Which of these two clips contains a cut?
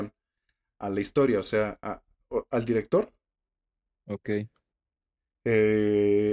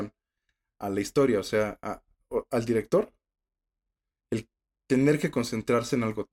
first; 1 cut; at 3.9 s

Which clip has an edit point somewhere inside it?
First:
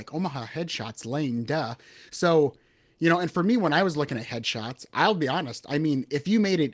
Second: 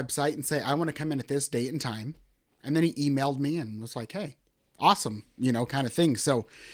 first; 1 cut; at 2.1 s

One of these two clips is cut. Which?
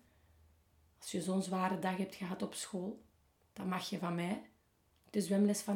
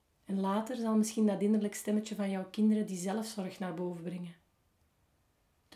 first; 1 cut; at 3.4 s

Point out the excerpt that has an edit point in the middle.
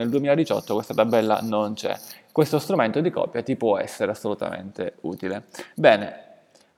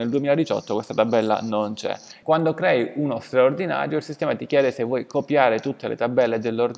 second; 1 cut; at 2.2 s

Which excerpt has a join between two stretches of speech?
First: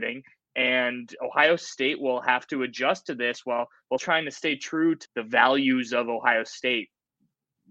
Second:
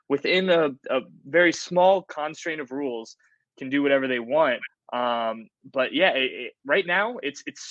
first; 2 cuts; at 4.0 s, 5.1 s

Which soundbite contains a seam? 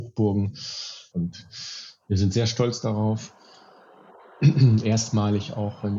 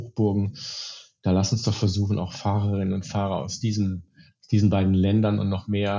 first; 1 cut; at 1.1 s

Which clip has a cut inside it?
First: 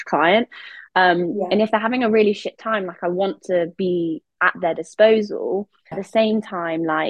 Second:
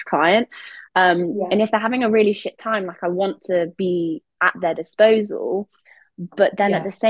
first; 1 cut; at 5.9 s

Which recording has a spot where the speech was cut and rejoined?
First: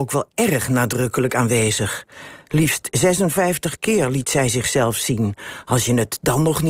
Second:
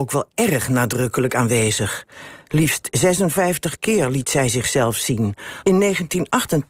second; 1 cut; at 5.6 s

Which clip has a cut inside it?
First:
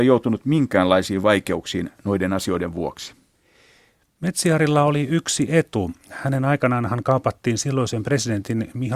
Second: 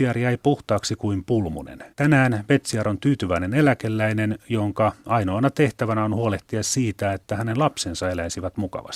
second; 1 cut; at 1.9 s

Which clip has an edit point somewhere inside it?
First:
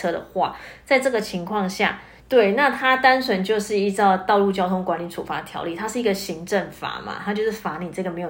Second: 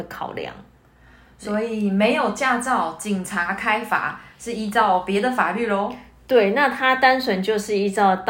first; 1 cut; at 2.2 s

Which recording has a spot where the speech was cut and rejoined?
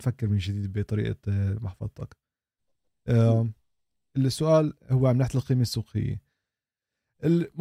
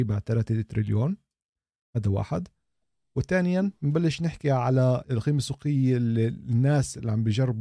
second; 1 cut; at 5.0 s

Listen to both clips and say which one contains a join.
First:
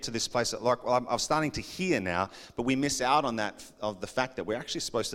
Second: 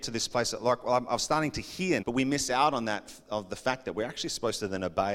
second; 1 cut; at 2.0 s

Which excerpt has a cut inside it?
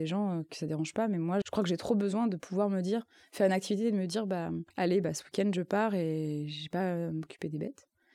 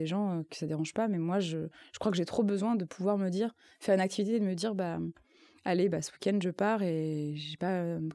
first; 2 cuts; at 1.4 s, 4.7 s

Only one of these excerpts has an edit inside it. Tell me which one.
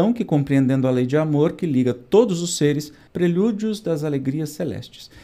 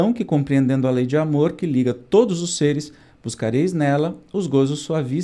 first; 1 cut; at 3.1 s

